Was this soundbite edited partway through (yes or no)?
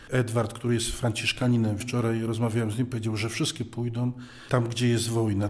no